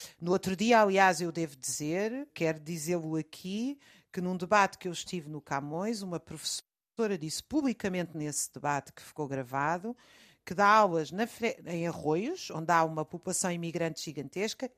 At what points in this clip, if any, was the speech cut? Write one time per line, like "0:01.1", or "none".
0:02.3